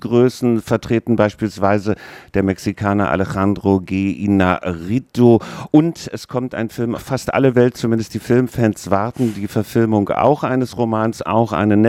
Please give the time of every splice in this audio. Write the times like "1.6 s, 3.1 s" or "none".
6.9 s